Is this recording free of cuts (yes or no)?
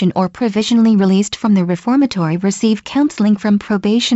yes